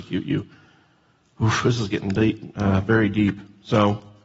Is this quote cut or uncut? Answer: uncut